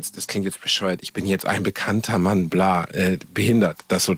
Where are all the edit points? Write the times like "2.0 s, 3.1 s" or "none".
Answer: none